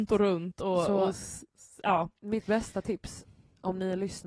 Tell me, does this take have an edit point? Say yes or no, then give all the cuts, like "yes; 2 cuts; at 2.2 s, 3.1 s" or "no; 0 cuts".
no; 0 cuts